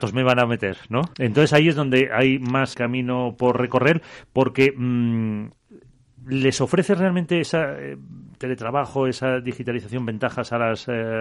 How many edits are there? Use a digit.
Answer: 2